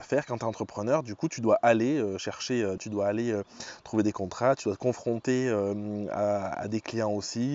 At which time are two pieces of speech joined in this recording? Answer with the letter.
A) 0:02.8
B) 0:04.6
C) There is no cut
A